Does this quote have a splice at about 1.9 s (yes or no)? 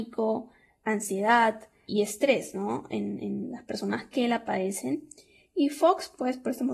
yes